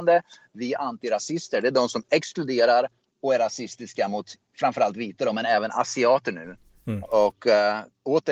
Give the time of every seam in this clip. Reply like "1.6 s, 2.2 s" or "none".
7.0 s